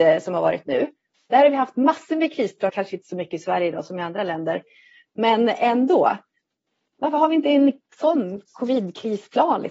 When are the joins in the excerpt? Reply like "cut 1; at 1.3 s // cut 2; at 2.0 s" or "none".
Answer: cut 1; at 2.7 s

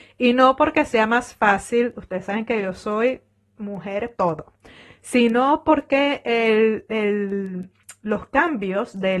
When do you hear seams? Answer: cut 1; at 4.1 s

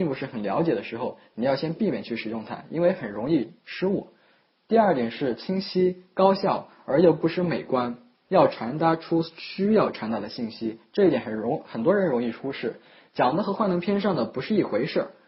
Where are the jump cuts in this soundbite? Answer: cut 1; at 8.3 s

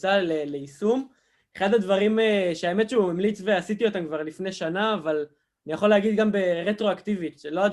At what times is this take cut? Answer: none

